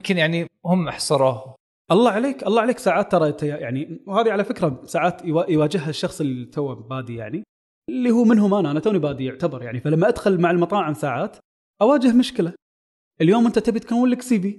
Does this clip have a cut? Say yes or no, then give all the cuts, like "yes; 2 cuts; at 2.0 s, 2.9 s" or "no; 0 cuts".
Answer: no; 0 cuts